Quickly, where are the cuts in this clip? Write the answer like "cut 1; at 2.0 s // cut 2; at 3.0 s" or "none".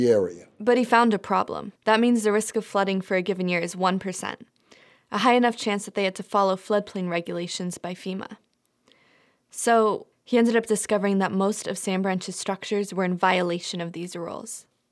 cut 1; at 1.8 s // cut 2; at 10.1 s